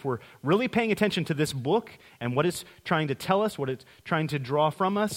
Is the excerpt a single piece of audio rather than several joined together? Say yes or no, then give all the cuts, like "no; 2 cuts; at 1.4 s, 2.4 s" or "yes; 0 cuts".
yes; 0 cuts